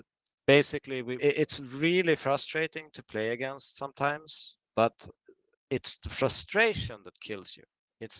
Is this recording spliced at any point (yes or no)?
yes